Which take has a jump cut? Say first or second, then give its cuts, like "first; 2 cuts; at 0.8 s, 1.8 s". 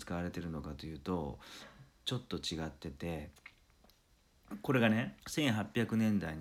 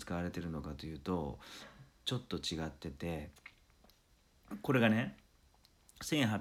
first; 1 cut; at 5.2 s